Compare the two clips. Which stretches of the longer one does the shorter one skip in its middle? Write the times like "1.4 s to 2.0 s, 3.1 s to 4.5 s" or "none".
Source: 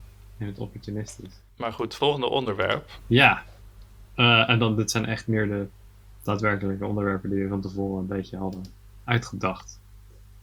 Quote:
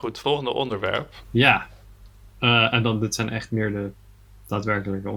none